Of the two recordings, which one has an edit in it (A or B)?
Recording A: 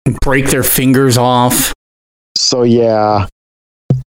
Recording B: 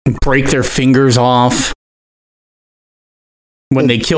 A